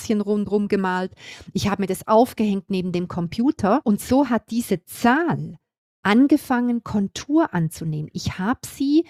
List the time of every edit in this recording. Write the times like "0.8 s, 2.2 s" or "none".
none